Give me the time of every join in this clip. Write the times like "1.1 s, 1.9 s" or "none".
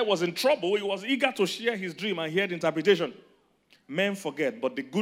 3.7 s